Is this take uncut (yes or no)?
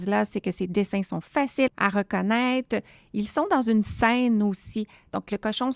yes